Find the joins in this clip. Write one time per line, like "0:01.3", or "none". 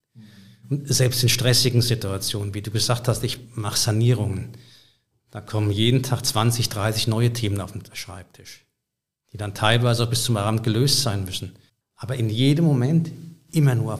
0:11.8